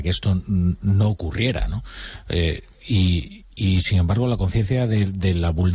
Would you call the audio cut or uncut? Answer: uncut